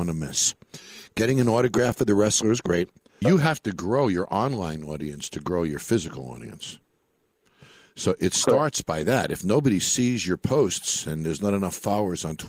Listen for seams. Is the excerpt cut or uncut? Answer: cut